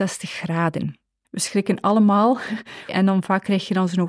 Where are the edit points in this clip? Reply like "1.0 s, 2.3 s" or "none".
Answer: 1.2 s, 2.9 s

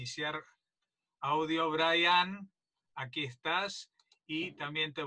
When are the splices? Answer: 2.7 s

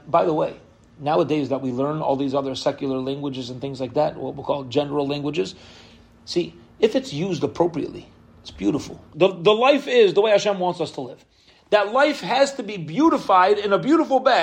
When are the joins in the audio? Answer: 9.1 s

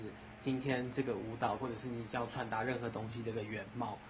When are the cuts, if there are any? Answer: 1.6 s

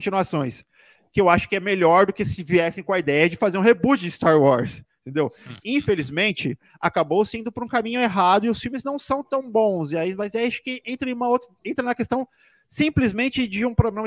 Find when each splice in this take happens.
none

